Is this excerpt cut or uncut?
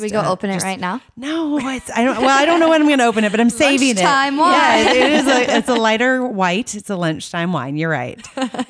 uncut